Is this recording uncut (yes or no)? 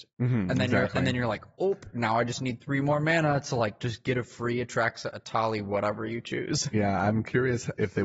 yes